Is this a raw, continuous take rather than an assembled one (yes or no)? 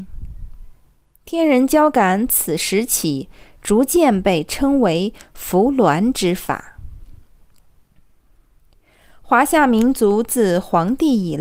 yes